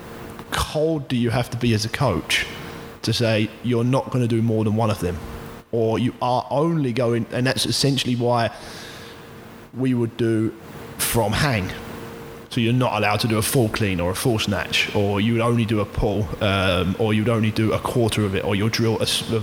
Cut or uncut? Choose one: uncut